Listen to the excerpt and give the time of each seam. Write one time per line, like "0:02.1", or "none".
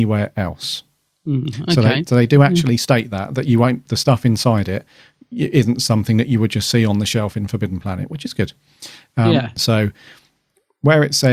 0:09.6